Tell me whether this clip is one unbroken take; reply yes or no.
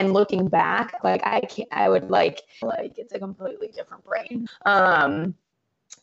no